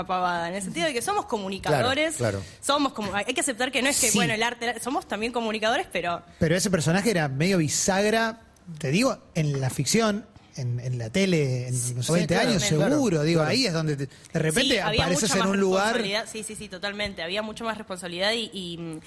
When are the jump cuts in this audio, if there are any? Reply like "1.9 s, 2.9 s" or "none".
12.1 s